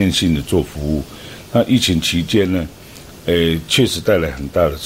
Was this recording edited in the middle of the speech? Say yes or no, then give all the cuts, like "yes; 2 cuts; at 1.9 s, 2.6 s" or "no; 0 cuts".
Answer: no; 0 cuts